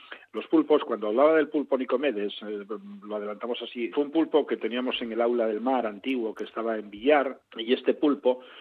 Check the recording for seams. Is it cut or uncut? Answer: cut